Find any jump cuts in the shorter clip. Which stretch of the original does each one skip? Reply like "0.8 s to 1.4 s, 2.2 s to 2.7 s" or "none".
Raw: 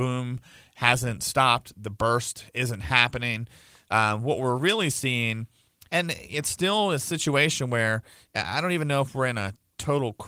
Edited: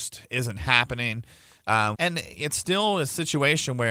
4.2 s to 5.9 s